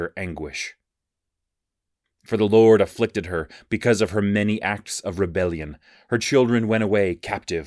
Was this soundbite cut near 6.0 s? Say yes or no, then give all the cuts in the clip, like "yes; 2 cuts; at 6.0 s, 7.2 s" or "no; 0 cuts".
no; 1 cut; at 2.0 s